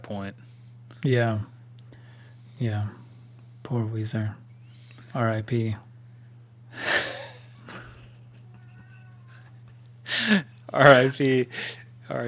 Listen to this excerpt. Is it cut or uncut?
uncut